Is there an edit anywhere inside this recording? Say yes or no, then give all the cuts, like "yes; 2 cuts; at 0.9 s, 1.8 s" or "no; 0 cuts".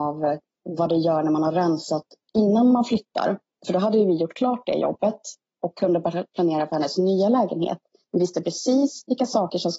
no; 0 cuts